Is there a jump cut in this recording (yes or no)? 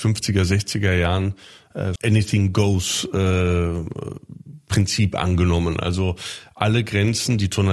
yes